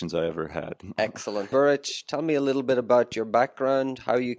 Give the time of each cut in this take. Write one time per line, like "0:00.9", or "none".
0:01.5

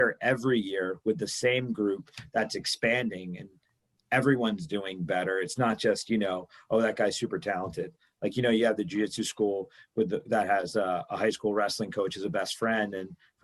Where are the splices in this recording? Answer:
none

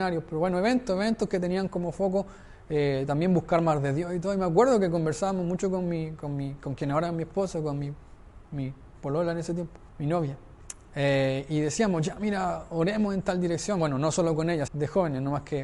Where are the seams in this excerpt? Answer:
0:09.9
0:14.7

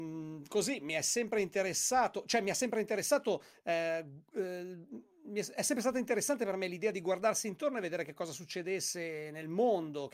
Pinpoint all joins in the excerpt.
none

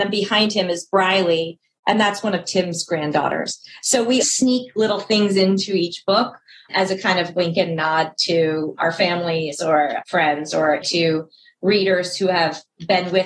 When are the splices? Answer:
0:04.2
0:10.8

